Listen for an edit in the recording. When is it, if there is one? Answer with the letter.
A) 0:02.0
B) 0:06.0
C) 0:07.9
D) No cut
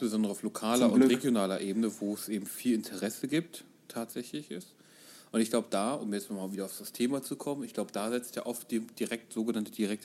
D